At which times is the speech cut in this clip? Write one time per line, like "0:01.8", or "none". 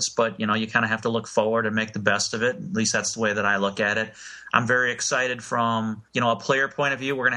0:06.1